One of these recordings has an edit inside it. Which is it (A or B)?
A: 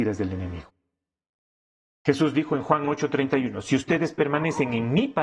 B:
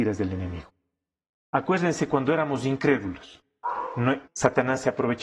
B